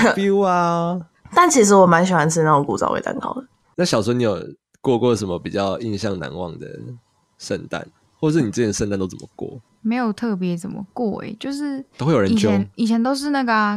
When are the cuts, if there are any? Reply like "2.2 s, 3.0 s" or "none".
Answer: none